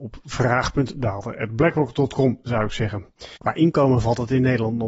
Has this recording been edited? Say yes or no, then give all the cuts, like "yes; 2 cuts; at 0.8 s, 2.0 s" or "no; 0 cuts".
yes; 1 cut; at 3.4 s